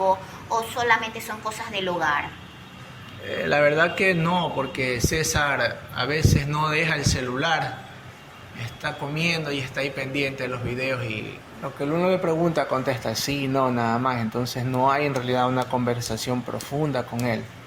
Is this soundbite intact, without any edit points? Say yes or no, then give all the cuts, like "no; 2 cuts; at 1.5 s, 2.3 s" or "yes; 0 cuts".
yes; 0 cuts